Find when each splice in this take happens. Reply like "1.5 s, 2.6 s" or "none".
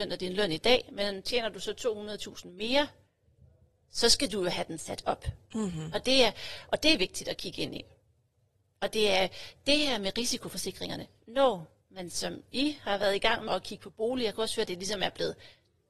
13.5 s, 14.7 s